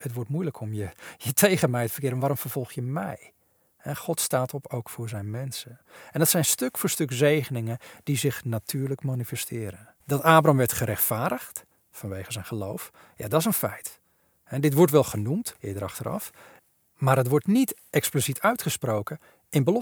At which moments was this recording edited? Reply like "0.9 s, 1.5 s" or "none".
10.0 s, 15.6 s